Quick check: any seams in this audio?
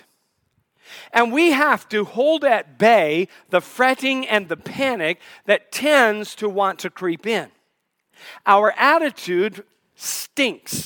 no; 0 cuts

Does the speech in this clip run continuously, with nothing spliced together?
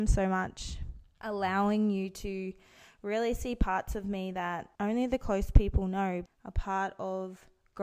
no; 3 cuts; at 1.2 s, 4.7 s, 6.3 s

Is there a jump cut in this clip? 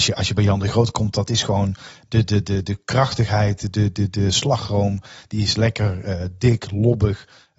no; 0 cuts

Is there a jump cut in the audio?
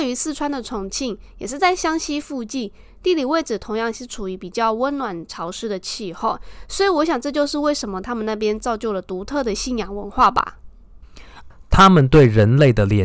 yes; 1 cut; at 11.5 s

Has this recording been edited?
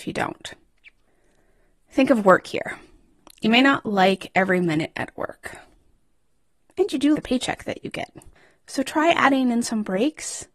yes; 1 cut; at 7.1 s

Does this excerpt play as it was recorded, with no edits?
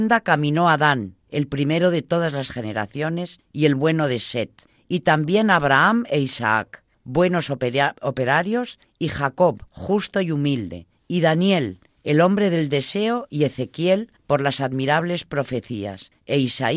yes; 0 cuts

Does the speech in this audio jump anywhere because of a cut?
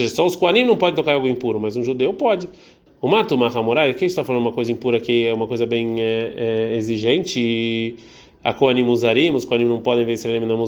yes; 1 cut; at 2.9 s

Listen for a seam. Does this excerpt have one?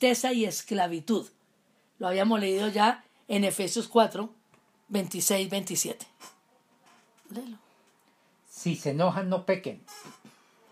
no; 0 cuts

